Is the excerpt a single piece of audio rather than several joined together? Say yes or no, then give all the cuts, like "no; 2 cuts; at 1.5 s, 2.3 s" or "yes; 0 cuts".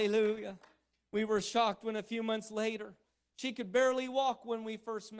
yes; 0 cuts